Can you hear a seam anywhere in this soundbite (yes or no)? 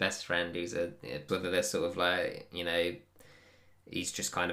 yes